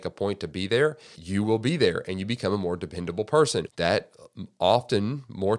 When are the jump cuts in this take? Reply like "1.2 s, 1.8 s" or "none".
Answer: 1.1 s, 3.7 s

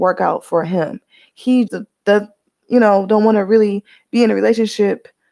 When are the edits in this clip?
1.7 s

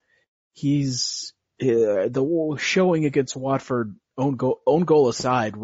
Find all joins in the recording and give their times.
none

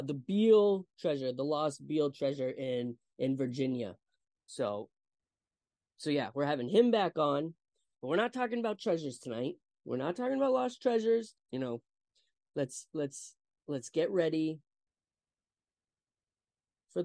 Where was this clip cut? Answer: 11.4 s

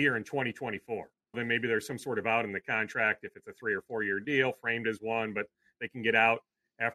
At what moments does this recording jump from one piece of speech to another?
1.3 s

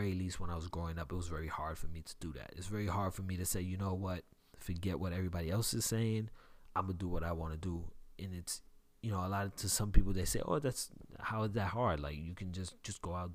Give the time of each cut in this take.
none

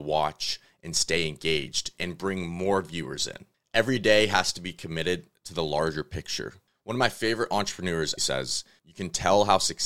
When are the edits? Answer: 8.2 s

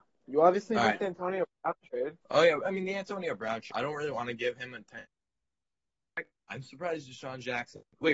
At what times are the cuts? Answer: 2.2 s, 3.7 s, 6.5 s

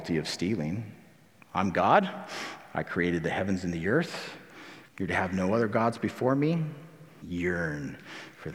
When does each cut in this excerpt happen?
1.4 s, 4.9 s, 7.2 s

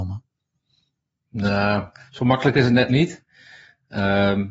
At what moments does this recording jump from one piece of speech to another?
none

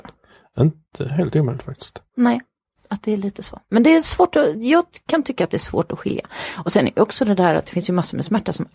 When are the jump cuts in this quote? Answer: none

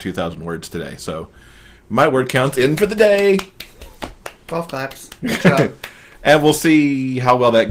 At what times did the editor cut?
none

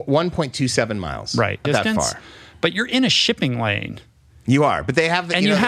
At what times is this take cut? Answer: 1.6 s

